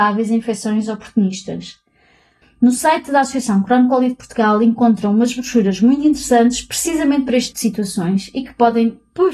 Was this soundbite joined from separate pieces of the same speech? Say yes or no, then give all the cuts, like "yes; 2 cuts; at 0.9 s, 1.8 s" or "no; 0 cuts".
yes; 2 cuts; at 2.4 s, 7.5 s